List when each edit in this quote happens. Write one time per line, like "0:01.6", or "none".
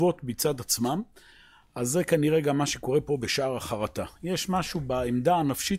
none